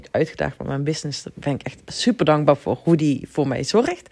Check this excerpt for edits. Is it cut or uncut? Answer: uncut